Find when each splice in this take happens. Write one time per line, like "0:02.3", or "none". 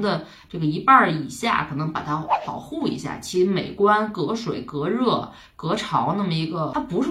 none